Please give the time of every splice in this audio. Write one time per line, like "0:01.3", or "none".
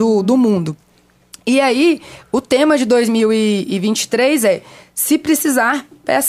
none